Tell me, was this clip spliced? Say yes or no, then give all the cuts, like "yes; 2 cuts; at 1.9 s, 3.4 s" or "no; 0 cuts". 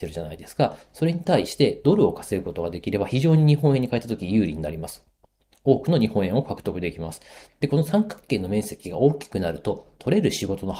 yes; 1 cut; at 7.5 s